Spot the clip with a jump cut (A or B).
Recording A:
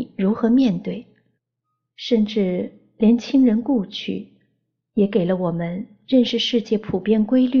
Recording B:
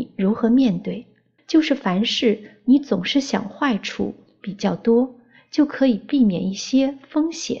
B